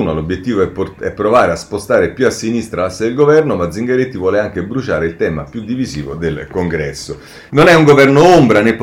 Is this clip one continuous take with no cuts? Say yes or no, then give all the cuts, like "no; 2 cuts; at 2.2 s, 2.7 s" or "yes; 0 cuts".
no; 1 cut; at 7.5 s